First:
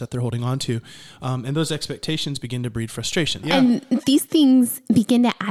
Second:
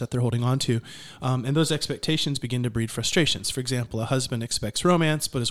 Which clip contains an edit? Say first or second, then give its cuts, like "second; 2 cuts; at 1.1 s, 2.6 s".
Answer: first; 1 cut; at 3.4 s